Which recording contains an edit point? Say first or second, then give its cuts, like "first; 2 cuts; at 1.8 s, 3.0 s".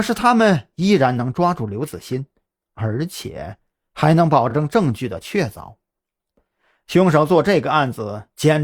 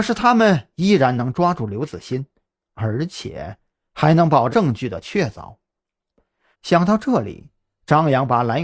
second; 2 cuts; at 4.5 s, 6.5 s